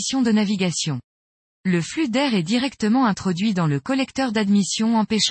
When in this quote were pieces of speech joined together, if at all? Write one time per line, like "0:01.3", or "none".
0:01.6